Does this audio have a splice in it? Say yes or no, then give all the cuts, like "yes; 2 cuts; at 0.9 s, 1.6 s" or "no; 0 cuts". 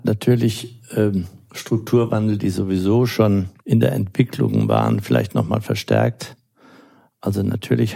no; 0 cuts